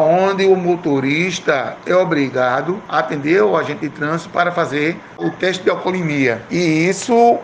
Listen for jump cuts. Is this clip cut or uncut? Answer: uncut